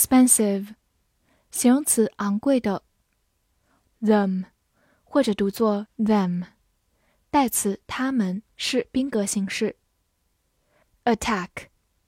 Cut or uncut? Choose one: cut